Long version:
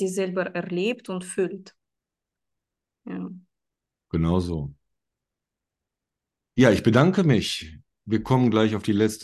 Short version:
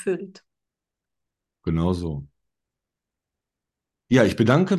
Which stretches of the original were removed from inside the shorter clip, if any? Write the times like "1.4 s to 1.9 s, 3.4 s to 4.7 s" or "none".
2.9 s to 4.0 s